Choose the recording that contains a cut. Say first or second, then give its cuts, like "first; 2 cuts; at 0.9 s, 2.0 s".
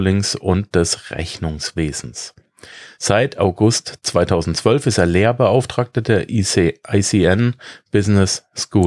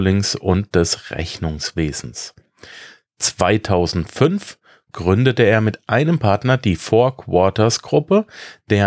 first; 1 cut; at 2.9 s